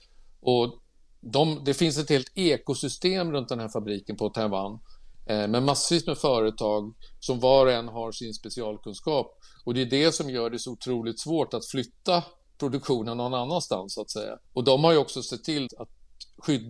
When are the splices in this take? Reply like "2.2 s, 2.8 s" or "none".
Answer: 14.5 s, 15.7 s